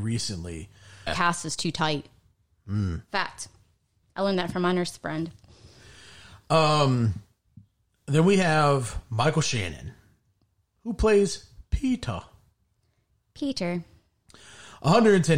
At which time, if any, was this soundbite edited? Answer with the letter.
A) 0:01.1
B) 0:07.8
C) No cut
A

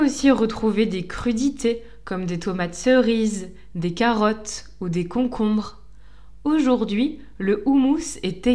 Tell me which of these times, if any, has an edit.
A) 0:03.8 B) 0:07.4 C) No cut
C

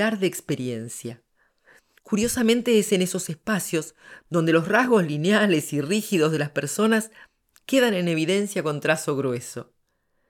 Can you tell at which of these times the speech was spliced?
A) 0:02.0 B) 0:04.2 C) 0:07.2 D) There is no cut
D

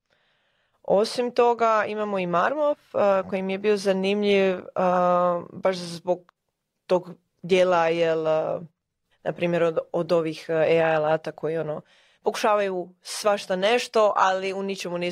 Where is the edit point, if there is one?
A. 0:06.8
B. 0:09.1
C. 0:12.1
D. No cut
B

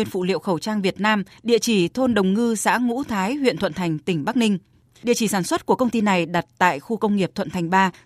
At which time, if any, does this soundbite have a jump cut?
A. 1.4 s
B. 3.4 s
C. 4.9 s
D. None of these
C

